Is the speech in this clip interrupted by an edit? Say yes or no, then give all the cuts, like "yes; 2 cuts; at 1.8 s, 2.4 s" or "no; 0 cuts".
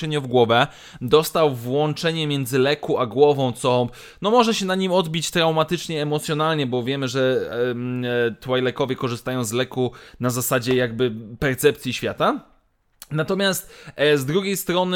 no; 0 cuts